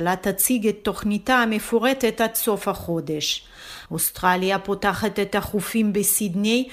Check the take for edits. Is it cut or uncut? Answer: cut